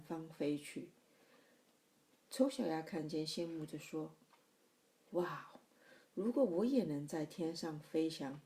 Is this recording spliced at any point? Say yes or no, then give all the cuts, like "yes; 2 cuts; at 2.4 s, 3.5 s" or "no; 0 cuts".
no; 0 cuts